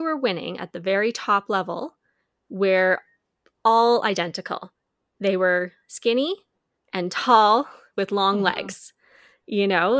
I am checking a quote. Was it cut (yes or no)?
no